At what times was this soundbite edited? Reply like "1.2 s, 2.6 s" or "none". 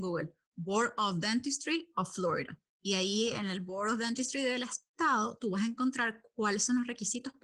none